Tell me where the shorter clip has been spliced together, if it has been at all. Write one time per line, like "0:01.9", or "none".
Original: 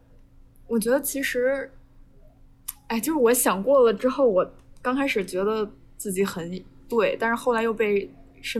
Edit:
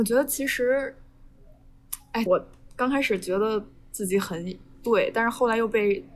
0:02.3